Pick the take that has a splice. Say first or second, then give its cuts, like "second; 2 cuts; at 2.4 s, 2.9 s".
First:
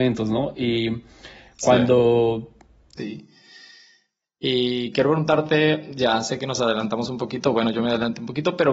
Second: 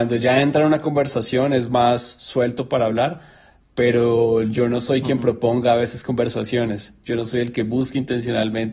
first; 1 cut; at 3.0 s